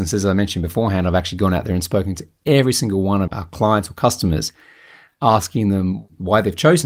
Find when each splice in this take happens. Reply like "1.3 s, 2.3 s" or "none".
3.3 s